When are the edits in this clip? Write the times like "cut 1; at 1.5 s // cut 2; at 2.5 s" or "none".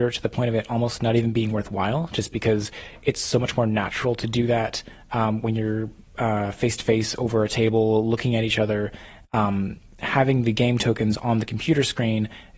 none